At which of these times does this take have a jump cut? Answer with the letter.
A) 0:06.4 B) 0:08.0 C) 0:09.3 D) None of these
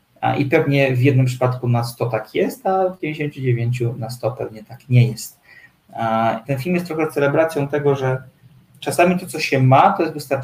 A